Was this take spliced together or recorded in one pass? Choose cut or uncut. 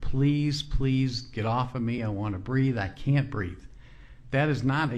uncut